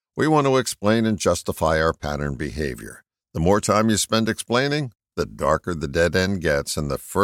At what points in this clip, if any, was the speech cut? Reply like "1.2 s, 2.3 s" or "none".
none